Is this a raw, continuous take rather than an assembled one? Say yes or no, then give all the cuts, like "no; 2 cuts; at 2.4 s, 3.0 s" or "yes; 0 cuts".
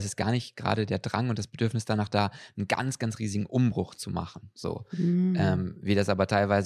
yes; 0 cuts